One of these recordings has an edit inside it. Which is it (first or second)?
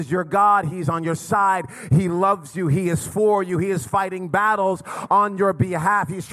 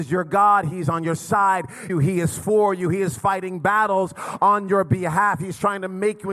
second